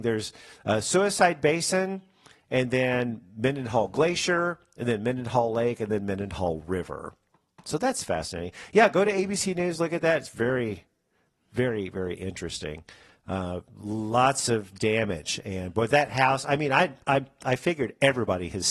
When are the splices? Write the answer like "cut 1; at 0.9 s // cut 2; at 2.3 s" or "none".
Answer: none